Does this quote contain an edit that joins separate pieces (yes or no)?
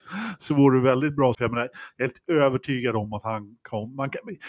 yes